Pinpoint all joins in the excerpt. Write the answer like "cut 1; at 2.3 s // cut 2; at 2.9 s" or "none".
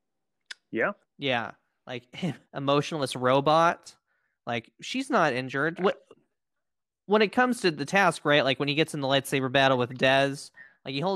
cut 1; at 1.0 s // cut 2; at 2.4 s // cut 3; at 5.8 s

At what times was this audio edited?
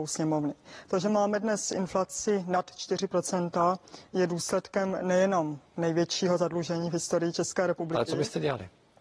none

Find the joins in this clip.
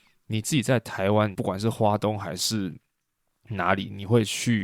cut 1; at 1.3 s

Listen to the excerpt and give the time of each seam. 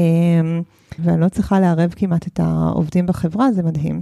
cut 1; at 1.0 s

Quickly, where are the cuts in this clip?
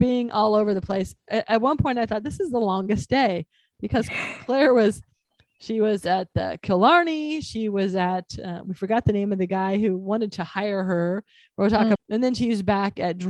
cut 1; at 12.0 s

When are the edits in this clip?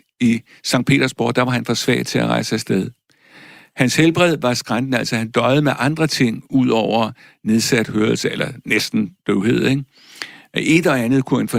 none

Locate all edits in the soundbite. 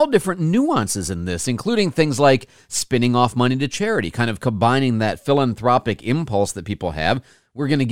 none

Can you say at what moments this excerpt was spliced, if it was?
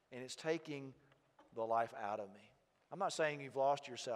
none

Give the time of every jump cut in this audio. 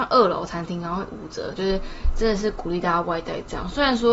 cut 1; at 1.6 s

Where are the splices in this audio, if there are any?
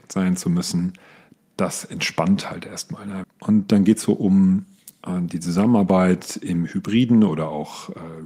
cut 1; at 3.2 s

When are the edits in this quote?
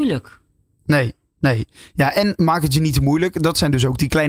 none

